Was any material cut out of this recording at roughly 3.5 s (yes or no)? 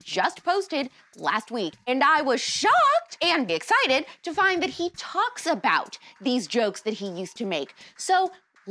yes